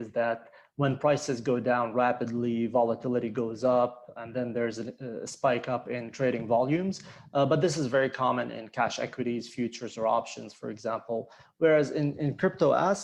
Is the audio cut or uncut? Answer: uncut